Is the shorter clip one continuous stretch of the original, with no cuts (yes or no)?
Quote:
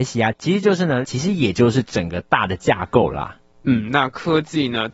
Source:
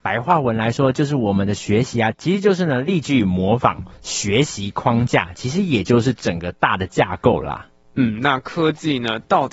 no